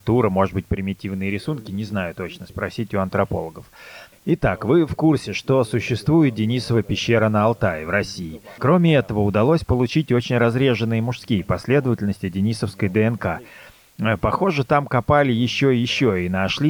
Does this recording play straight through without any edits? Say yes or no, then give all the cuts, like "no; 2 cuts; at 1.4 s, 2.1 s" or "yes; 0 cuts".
no; 2 cuts; at 4.1 s, 8.6 s